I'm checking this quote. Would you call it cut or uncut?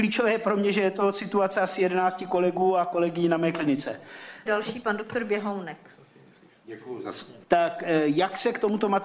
cut